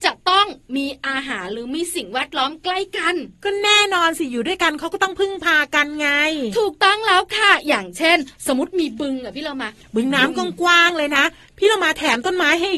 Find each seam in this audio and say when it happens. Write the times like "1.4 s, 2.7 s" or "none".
none